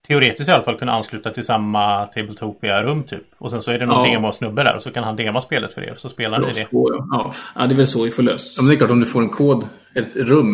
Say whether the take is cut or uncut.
uncut